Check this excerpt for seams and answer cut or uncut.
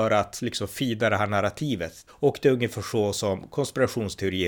cut